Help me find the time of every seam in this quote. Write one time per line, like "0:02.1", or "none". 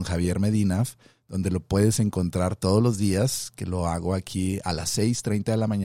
none